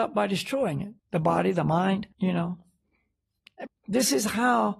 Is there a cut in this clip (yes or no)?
yes